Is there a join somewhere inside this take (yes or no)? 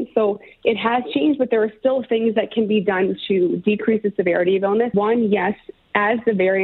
yes